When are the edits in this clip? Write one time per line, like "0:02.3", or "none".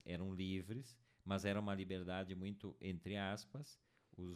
none